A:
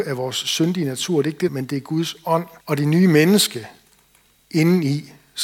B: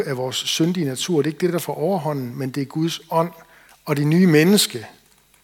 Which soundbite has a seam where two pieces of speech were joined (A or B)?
A